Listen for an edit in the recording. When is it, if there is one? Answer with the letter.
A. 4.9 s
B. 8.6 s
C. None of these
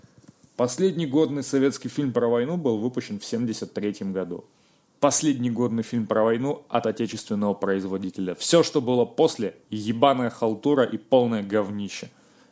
A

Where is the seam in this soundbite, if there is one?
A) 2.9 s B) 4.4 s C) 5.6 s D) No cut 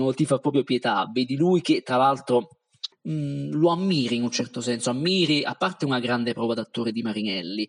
A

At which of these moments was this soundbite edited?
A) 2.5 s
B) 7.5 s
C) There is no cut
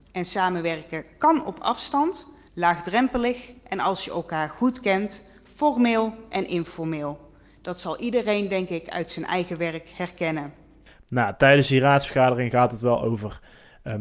A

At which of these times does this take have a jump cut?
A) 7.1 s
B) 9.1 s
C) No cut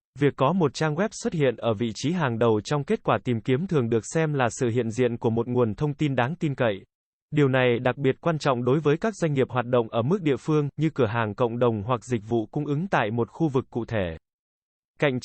A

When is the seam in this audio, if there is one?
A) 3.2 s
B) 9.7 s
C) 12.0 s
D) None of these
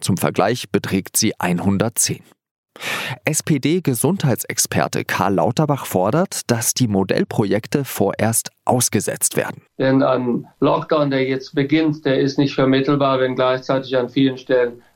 B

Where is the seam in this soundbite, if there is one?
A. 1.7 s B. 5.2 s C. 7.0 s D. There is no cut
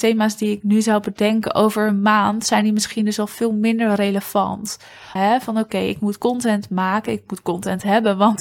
B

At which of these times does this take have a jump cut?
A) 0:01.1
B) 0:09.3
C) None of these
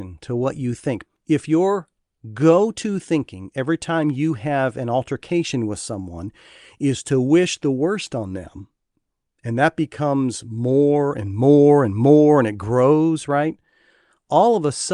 A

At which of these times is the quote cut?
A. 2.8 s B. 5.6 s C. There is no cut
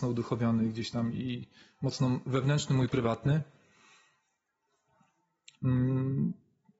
B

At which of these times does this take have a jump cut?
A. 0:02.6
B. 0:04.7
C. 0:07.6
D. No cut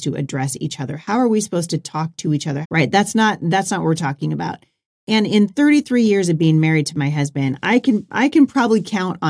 A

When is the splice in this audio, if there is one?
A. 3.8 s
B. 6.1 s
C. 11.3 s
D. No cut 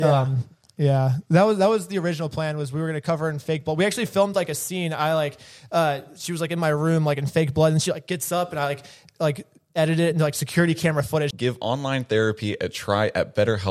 C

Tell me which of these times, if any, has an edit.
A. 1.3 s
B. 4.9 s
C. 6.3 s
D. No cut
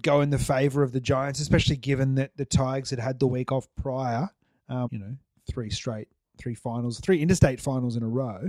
B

